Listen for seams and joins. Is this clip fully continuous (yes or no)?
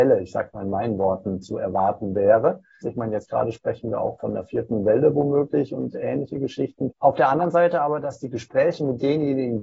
no